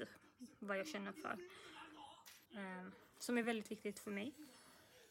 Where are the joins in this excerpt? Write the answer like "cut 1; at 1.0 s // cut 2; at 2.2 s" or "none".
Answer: cut 1; at 2.5 s